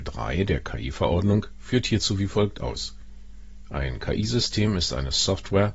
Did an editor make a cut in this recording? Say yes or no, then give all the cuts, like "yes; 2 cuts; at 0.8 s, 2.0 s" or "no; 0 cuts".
no; 0 cuts